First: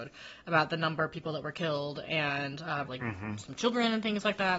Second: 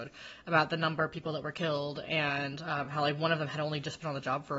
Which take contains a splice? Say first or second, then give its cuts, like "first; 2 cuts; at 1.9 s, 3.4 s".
first; 1 cut; at 2.8 s